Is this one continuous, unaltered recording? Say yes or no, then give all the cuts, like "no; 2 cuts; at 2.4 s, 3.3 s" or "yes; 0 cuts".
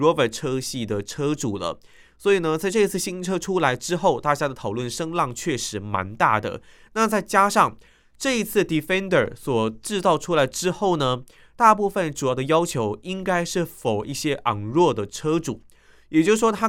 yes; 0 cuts